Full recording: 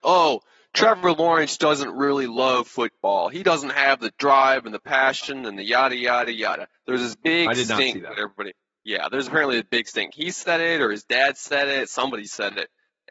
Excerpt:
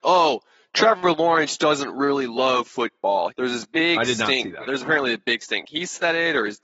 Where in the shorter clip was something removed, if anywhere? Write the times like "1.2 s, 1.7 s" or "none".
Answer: 3.3 s, 4.6 s